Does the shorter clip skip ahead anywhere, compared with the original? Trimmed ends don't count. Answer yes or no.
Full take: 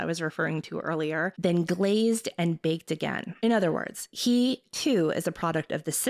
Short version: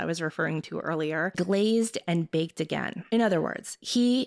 yes